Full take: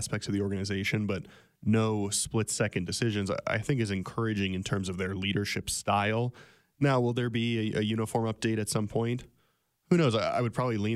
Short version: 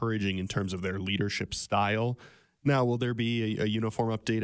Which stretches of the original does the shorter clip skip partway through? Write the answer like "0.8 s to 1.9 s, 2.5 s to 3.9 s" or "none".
none